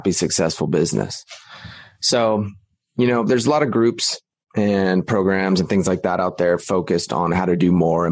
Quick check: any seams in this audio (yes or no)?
no